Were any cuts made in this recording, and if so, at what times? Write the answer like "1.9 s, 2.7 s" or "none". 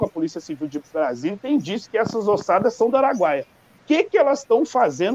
none

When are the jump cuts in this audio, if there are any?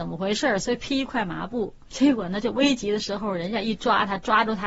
none

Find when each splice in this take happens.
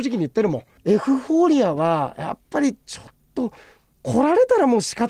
none

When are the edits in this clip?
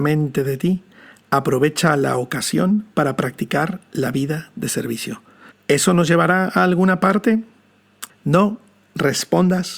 5.5 s, 8.1 s

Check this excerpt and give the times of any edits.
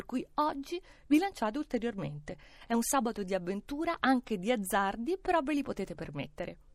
none

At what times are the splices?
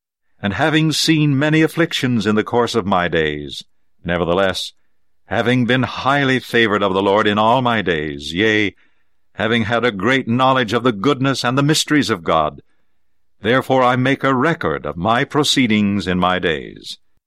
none

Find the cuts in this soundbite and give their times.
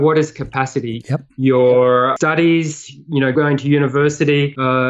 1.0 s, 3.3 s

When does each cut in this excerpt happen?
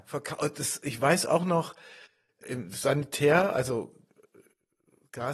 none

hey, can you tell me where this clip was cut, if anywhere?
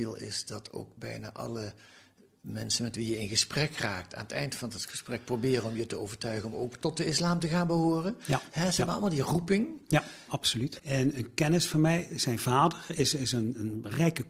10.8 s

